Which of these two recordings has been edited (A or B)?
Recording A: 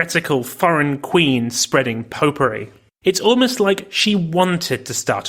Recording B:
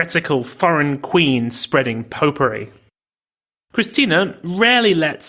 A